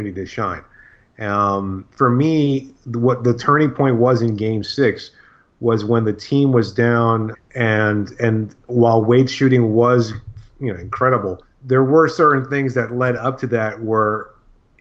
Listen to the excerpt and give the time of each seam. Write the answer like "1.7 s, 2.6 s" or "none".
7.3 s, 11.5 s

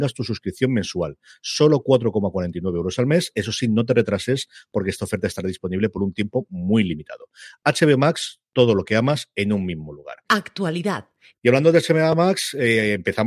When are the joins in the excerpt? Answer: 11.3 s

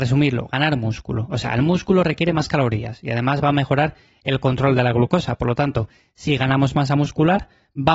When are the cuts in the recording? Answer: none

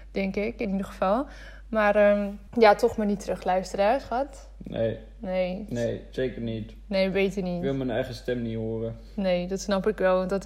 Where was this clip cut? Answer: 2.5 s

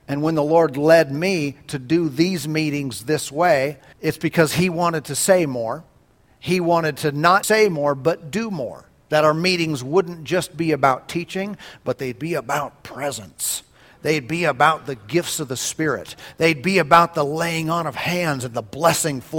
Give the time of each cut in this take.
3.9 s, 7.4 s

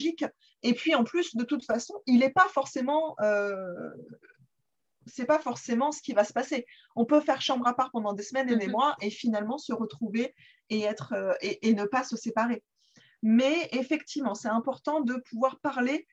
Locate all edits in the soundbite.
none

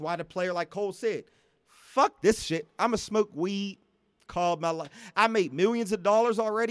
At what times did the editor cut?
none

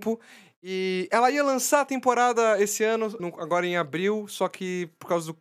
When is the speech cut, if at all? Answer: 3.2 s

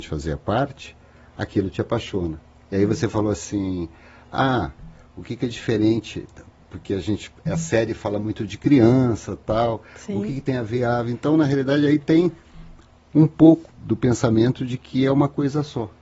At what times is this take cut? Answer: 13.7 s

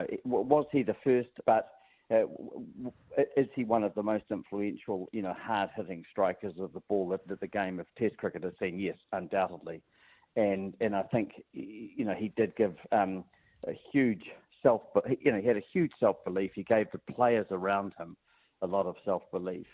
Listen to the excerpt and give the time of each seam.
1.4 s

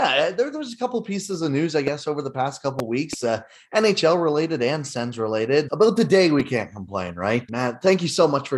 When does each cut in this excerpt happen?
5.7 s, 7.5 s

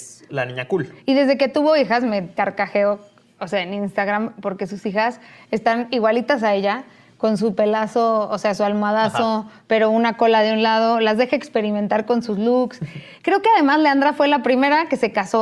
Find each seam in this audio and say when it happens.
none

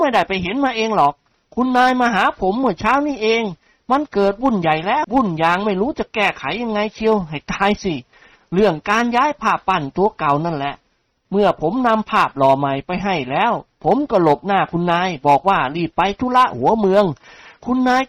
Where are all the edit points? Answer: 5.0 s

